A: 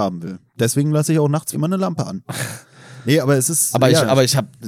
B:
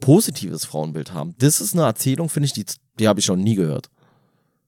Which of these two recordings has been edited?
A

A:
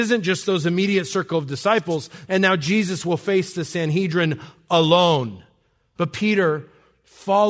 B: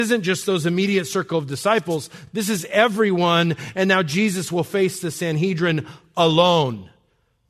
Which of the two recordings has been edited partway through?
A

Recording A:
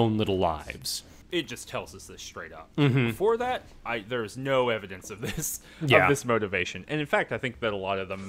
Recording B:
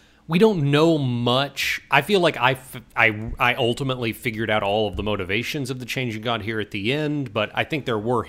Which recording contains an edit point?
A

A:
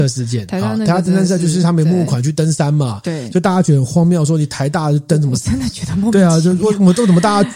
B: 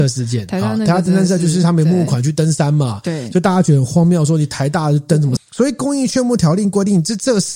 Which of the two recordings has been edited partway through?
B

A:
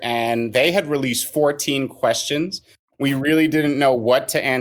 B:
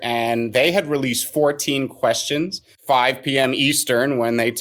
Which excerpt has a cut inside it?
B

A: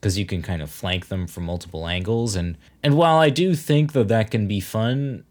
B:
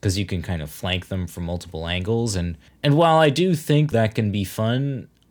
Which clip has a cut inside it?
B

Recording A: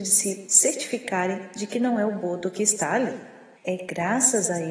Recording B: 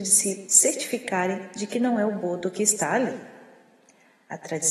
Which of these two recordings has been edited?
A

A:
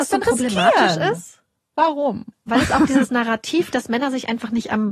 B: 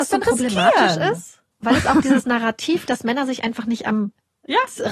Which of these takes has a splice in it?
B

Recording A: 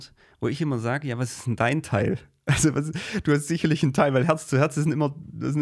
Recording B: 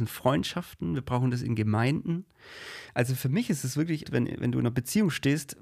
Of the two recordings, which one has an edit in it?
B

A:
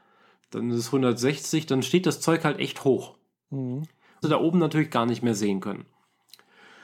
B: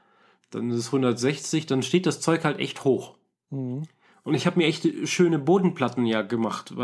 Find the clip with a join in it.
A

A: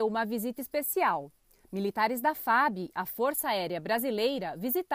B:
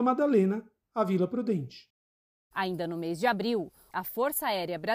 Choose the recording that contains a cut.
B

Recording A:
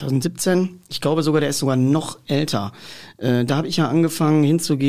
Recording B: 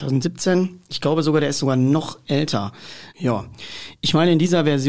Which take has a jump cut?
B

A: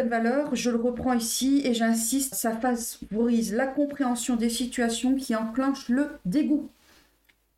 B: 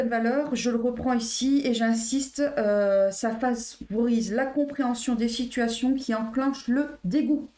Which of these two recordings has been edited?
A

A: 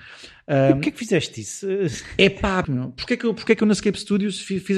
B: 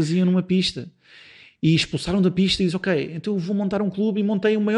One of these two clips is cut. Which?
A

